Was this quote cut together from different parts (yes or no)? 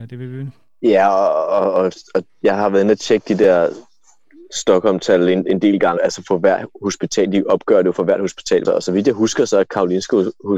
yes